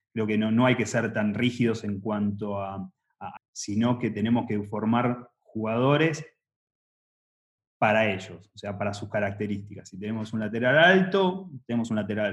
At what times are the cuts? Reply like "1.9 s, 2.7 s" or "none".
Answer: 3.4 s